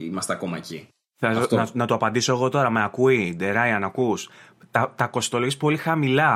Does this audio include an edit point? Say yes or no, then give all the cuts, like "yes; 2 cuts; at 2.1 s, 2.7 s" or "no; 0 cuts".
no; 0 cuts